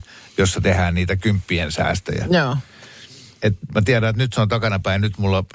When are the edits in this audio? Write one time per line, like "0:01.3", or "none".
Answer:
0:03.4